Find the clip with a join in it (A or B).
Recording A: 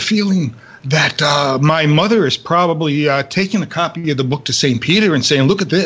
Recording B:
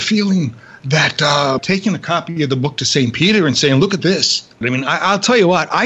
B